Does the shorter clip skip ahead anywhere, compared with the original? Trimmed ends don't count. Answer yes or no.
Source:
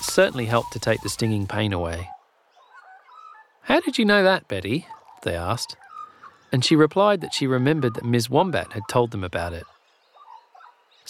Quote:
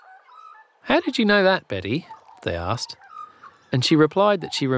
no